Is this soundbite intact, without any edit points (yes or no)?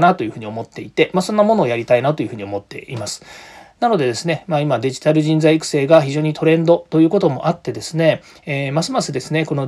yes